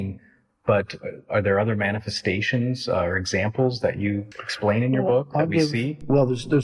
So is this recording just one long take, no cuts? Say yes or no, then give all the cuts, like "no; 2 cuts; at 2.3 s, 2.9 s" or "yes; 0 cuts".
no; 1 cut; at 4.3 s